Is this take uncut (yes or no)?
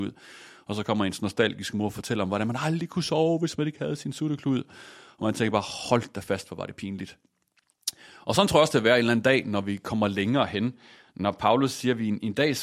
yes